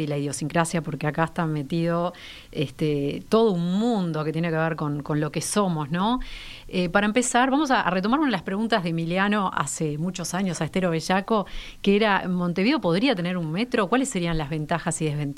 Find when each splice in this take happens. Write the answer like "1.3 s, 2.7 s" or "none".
none